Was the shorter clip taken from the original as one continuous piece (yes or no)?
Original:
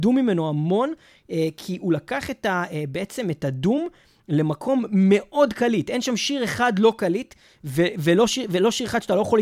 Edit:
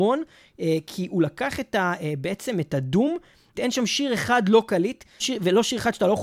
no